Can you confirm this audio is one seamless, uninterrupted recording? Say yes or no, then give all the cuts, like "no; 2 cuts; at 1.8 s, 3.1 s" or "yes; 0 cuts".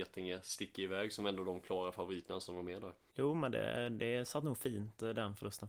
no; 1 cut; at 3.1 s